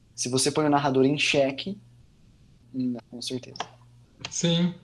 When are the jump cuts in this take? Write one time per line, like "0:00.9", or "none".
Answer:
0:03.0